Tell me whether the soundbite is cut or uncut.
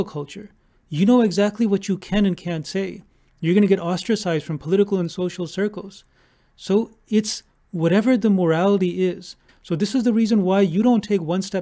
cut